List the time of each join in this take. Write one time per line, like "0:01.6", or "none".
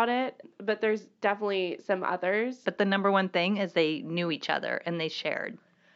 0:02.6